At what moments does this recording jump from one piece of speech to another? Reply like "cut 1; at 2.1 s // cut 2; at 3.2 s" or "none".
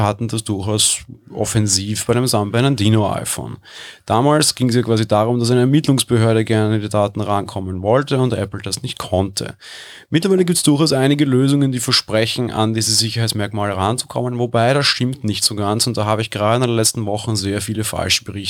none